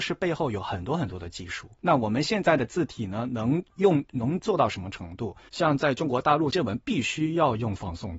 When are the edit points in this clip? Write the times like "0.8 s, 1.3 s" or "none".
1.7 s, 5.5 s, 6.5 s